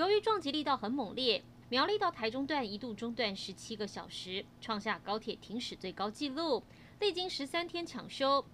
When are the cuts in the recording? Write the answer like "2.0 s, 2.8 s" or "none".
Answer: 1.6 s

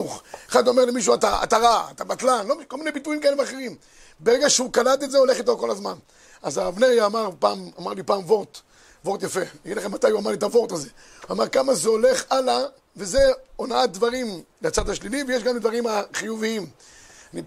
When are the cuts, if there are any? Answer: 1.2 s

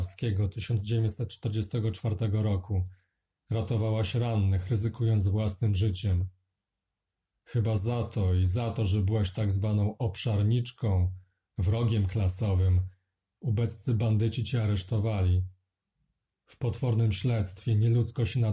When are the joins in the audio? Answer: none

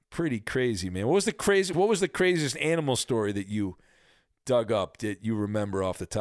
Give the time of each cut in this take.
1.7 s

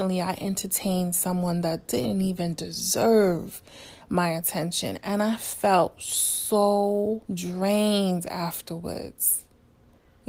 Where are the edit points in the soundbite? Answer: 7.2 s

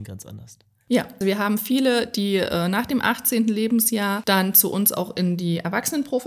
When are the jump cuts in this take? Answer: 1.2 s

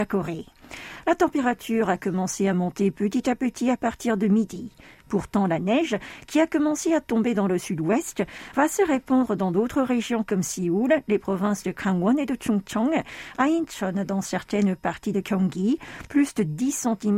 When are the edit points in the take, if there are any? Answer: none

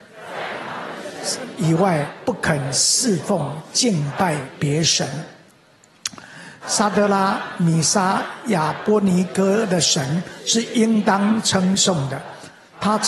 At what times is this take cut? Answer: 6.6 s

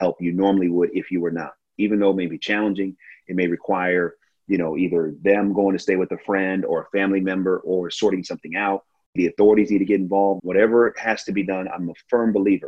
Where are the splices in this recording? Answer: 1.8 s, 9.2 s, 10.4 s

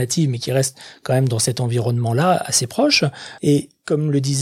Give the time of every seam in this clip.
3.4 s

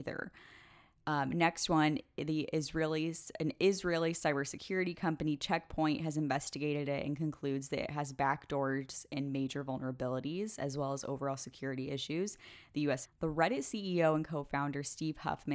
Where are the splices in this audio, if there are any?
13.1 s

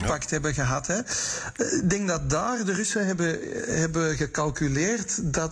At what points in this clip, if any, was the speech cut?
none

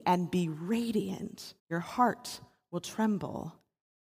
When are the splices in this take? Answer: 1.6 s

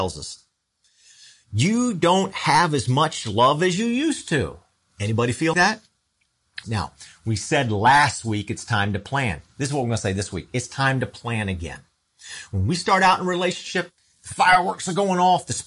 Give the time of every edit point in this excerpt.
5.5 s, 6.6 s

